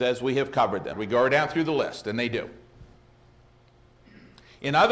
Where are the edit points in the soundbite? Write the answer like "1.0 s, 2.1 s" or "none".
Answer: 0.9 s